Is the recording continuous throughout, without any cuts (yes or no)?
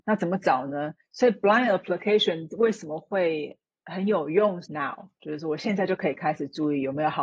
no